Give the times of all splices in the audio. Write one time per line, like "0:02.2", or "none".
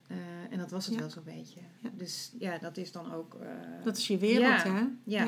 0:02.3

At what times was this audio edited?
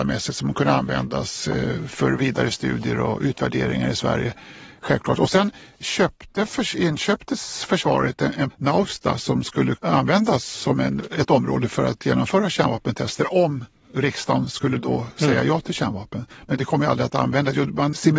0:08.5

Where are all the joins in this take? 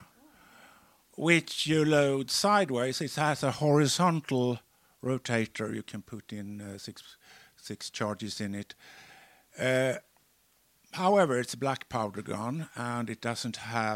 none

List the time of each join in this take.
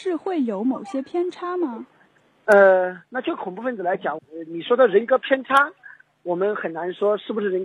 0:04.2

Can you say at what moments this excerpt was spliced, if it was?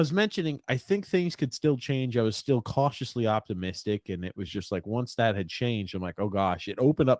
none

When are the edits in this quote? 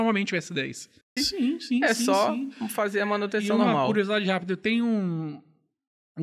0:01.2

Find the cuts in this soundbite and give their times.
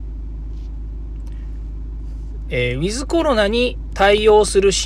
0:02.5

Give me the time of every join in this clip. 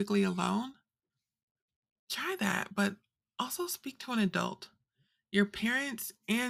none

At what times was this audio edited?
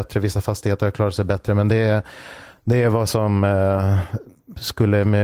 none

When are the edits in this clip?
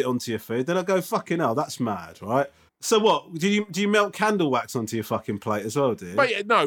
0:02.7

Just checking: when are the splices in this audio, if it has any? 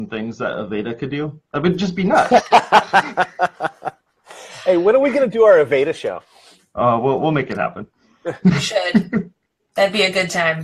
none

